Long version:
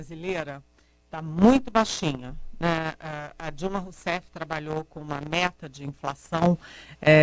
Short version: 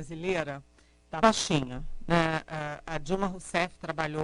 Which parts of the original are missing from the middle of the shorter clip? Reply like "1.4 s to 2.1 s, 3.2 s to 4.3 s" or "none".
1.2 s to 1.7 s